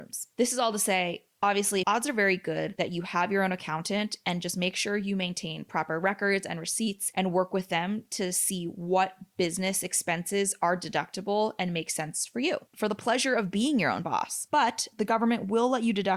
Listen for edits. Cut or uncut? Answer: cut